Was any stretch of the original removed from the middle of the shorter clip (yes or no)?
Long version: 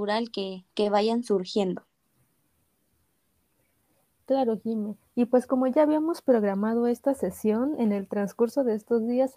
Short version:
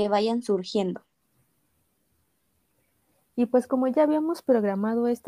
yes